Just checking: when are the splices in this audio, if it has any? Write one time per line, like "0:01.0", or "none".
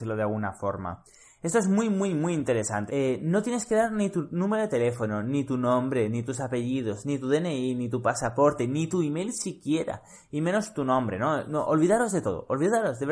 0:02.9

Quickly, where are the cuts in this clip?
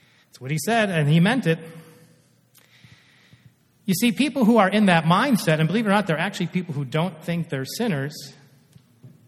none

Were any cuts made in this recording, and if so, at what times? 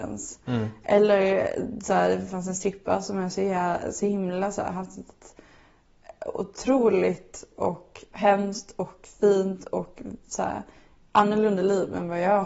none

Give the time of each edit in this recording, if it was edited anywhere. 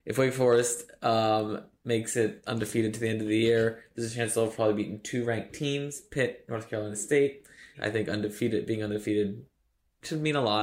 0:07.7

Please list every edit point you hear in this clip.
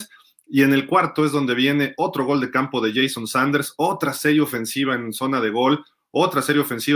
none

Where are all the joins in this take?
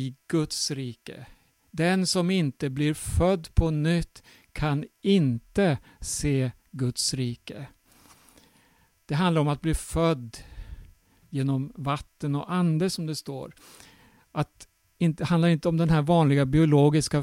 0:01.7

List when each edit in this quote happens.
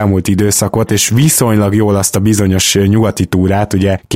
none

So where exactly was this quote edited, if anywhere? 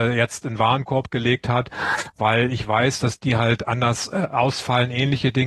none

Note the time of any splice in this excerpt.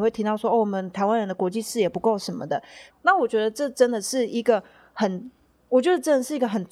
0:02.9

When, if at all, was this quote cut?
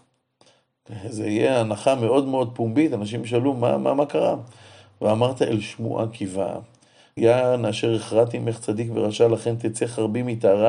0:07.2

